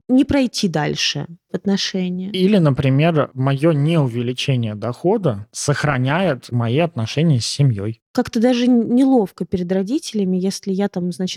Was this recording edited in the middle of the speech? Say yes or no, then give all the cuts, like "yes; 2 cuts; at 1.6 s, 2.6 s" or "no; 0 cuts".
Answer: no; 0 cuts